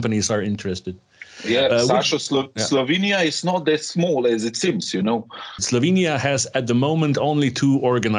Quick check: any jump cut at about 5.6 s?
yes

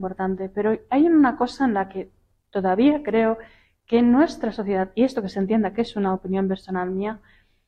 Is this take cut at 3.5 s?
no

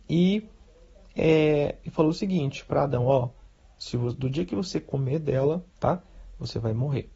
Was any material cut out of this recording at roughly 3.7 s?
no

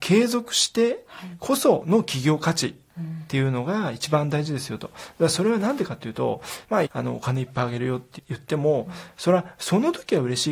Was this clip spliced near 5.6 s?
no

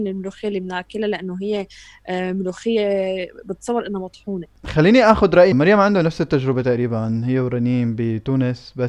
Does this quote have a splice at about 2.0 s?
no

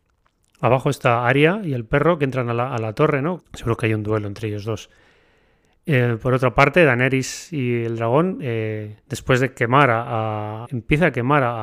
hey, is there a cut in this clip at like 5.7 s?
no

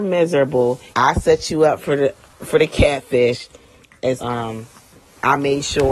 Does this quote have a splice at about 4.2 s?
yes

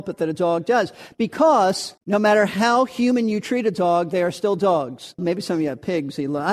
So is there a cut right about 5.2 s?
yes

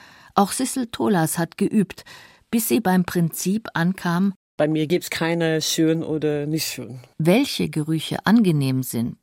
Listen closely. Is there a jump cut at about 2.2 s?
no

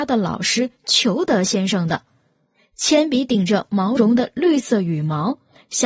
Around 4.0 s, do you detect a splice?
yes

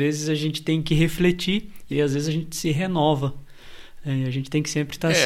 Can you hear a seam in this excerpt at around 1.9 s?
yes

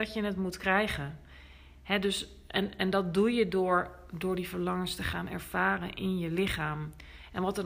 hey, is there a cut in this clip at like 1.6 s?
no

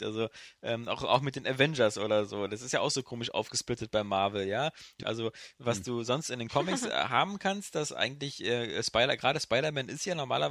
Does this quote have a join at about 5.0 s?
yes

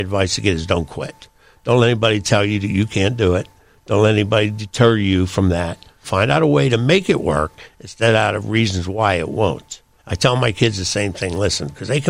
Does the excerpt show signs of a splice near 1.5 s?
no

